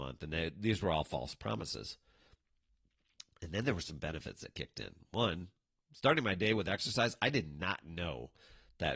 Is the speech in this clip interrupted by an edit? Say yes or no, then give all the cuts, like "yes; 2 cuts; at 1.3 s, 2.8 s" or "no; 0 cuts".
no; 0 cuts